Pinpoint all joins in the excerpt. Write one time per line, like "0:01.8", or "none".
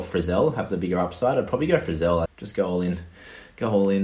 0:02.3

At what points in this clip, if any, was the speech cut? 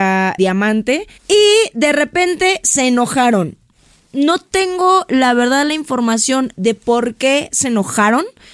0:01.2

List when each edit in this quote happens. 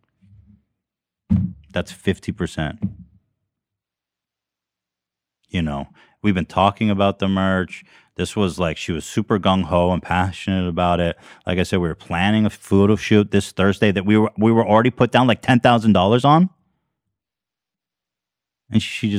none

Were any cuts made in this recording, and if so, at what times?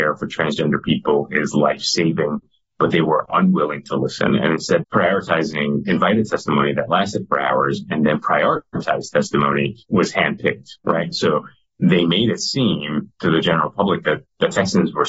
0:04.8

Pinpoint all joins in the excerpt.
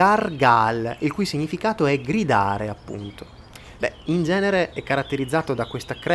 0:03.8

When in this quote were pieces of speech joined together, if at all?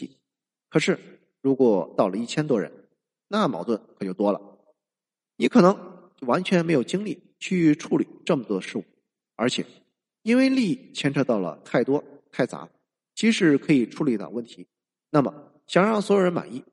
none

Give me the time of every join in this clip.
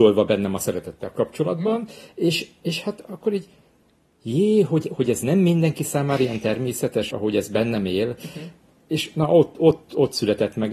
0:07.1

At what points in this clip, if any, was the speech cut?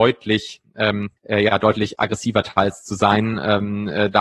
0:01.2

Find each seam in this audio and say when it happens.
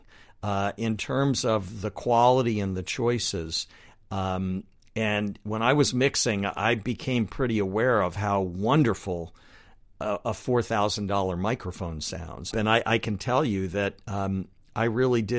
0:12.5

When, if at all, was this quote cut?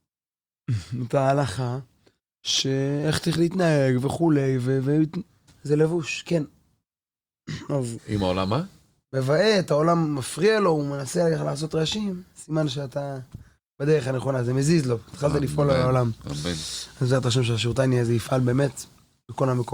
0:05.5
0:08.0

